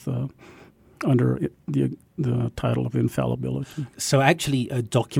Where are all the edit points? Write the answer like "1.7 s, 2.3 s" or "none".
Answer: 3.9 s